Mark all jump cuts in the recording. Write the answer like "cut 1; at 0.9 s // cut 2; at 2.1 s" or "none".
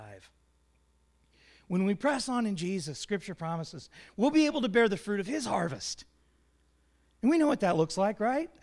none